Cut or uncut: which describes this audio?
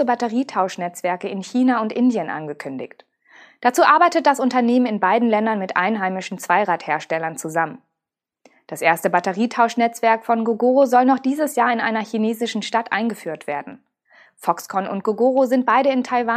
cut